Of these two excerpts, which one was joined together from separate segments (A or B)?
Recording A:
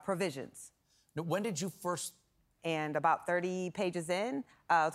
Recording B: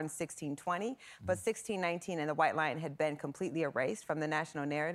A